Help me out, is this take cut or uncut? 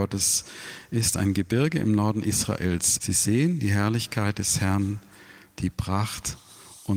cut